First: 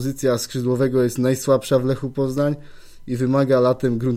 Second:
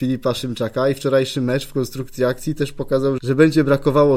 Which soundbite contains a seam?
second; 1 cut; at 3.2 s

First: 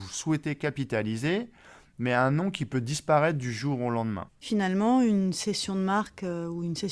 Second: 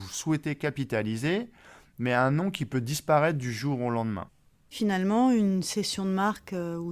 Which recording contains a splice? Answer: first; 1 cut; at 4.3 s

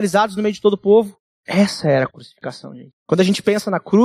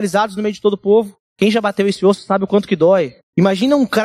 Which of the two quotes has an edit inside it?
second; 1 cut; at 1.3 s

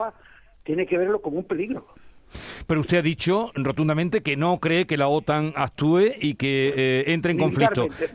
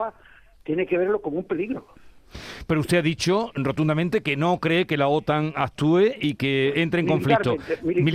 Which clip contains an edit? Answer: second; 1 cut; at 6.7 s

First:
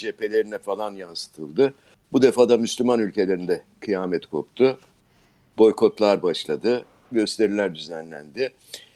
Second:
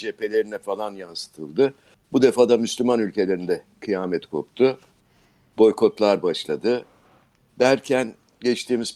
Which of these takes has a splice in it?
first; 1 cut; at 7.1 s

